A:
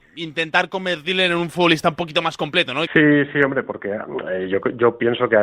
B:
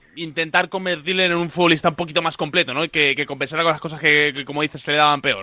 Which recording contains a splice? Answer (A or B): A